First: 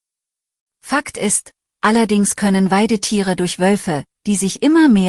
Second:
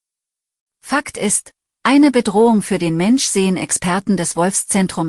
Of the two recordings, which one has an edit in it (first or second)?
first